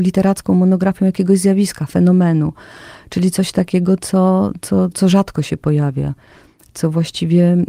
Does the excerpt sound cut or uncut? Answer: cut